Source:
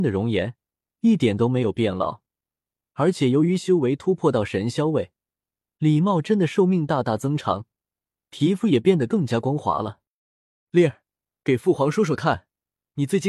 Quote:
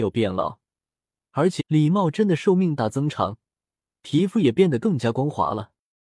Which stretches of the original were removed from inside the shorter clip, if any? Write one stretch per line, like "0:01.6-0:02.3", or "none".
0:03.2-0:05.7
0:06.9-0:07.0